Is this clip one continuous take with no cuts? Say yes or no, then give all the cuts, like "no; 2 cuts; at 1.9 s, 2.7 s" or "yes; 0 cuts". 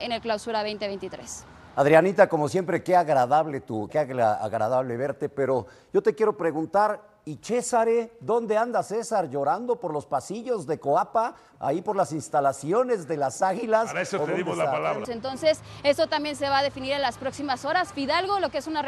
no; 2 cuts; at 3.9 s, 15.0 s